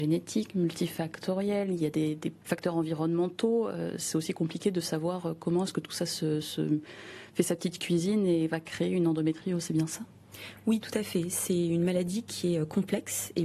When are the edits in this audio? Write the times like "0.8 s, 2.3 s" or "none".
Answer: none